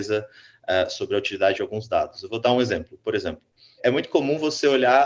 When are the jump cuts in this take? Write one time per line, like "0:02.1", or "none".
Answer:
0:03.8